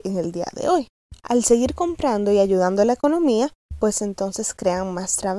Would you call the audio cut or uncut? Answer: uncut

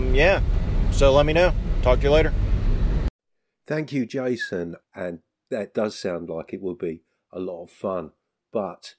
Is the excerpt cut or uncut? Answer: cut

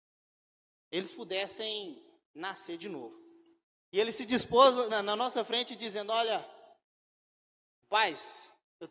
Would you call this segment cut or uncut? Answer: cut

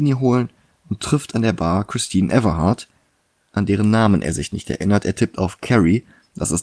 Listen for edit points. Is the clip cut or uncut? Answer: uncut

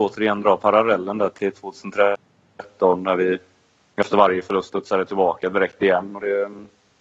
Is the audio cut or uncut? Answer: uncut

